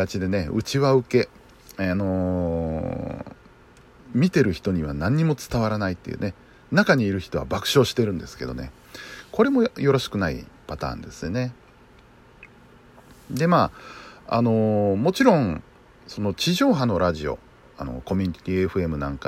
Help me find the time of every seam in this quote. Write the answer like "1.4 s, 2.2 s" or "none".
none